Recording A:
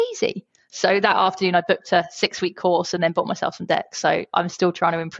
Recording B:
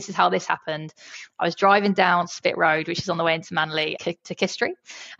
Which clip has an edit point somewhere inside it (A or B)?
B